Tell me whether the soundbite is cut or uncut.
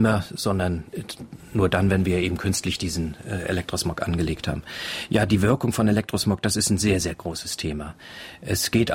uncut